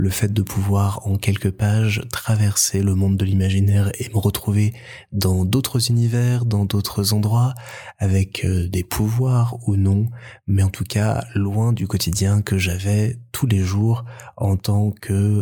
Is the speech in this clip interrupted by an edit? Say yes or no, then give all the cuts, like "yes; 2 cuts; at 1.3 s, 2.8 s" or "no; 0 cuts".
no; 0 cuts